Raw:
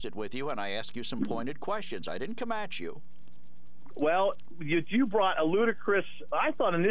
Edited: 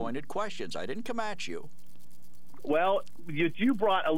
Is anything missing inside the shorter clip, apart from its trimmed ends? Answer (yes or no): no